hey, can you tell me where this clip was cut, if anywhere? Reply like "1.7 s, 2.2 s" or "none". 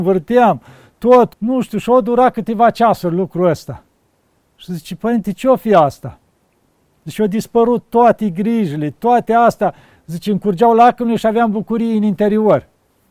1.3 s